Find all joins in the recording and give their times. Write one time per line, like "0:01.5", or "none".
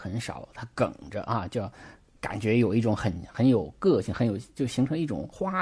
none